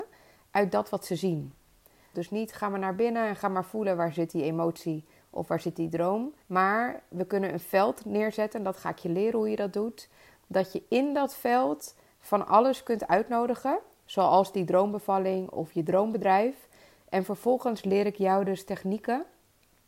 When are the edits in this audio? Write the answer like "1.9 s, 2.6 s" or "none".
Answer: 2.1 s, 6.4 s